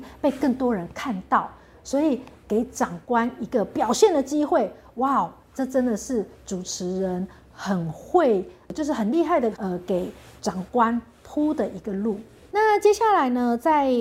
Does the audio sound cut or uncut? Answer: cut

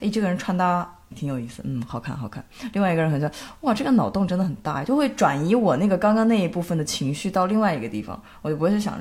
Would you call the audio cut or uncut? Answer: cut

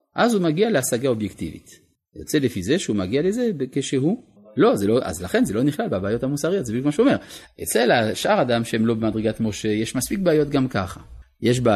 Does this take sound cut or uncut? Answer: cut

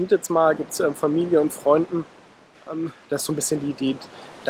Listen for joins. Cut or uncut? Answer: cut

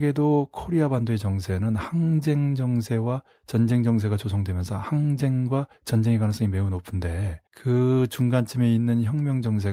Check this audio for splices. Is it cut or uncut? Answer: cut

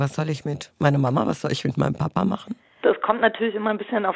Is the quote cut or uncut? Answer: cut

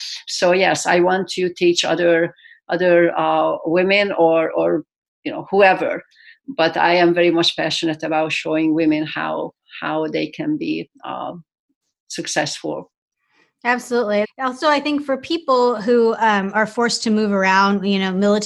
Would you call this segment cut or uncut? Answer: cut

